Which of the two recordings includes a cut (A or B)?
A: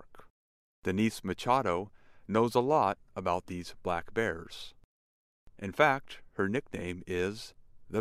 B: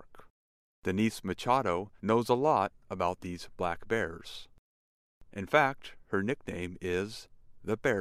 B